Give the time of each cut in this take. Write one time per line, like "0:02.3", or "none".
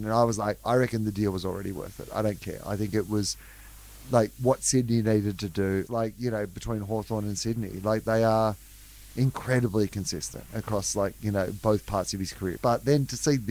0:05.9
0:12.6